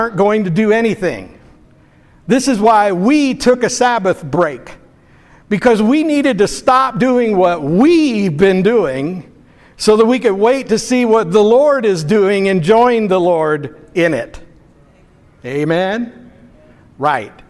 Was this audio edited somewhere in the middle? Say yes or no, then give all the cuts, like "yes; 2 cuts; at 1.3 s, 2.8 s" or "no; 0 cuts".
no; 0 cuts